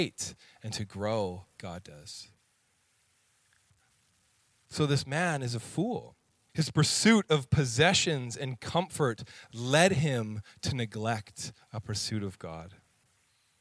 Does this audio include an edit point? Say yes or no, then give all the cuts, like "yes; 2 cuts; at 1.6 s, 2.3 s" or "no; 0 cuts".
yes; 2 cuts; at 1.6 s, 6.5 s